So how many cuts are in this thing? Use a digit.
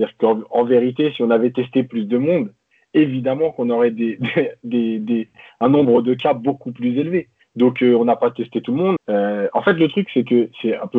2